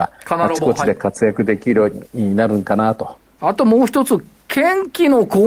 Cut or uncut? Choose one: cut